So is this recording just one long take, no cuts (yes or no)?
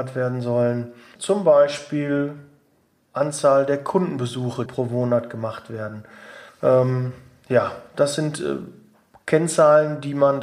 no